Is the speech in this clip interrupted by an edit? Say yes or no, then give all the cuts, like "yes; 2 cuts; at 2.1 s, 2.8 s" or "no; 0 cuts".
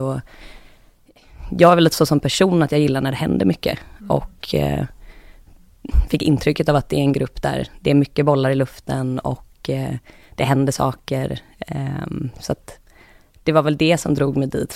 no; 0 cuts